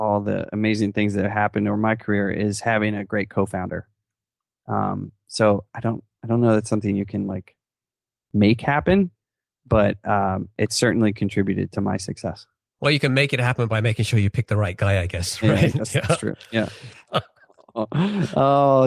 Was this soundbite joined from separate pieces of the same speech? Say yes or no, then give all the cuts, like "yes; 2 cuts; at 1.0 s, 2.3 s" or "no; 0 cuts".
yes; 1 cut; at 17.1 s